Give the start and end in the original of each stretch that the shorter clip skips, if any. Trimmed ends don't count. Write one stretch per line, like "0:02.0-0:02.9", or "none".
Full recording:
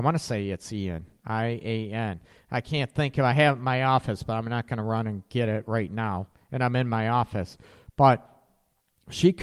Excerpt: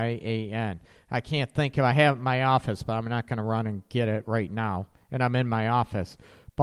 none